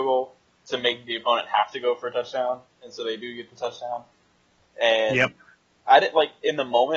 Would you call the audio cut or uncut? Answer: uncut